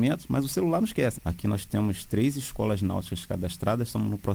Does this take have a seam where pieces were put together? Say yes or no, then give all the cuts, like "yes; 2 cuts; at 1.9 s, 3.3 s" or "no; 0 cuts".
yes; 1 cut; at 1.1 s